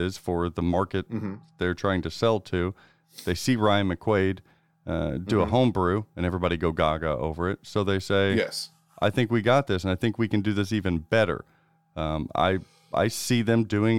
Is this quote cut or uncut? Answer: uncut